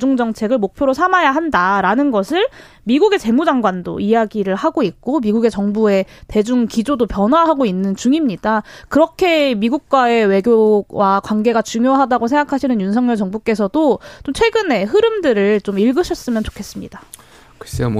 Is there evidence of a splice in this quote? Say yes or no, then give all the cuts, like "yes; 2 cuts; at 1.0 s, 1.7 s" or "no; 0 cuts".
no; 0 cuts